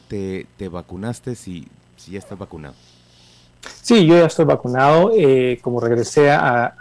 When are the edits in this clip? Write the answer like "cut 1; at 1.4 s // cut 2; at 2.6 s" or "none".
none